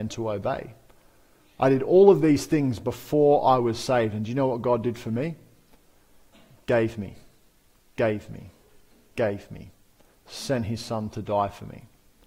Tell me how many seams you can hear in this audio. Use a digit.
0